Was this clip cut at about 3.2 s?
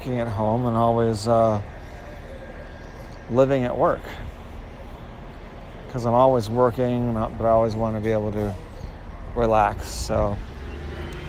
no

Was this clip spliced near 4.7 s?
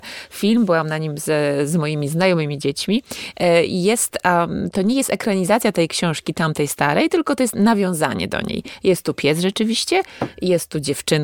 yes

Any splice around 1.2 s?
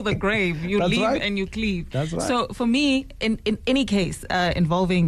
no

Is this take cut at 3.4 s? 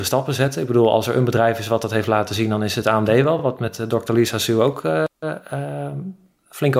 no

